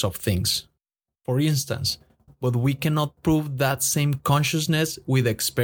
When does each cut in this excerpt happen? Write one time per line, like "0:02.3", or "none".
0:02.3